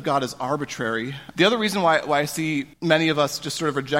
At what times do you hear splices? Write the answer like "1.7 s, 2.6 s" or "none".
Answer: 1.3 s, 2.7 s